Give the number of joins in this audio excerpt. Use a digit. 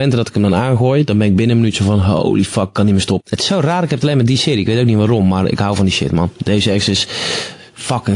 1